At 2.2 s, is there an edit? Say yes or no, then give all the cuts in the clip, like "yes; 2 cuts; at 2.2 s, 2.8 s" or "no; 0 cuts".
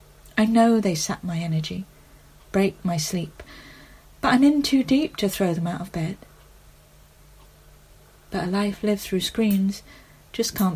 no; 0 cuts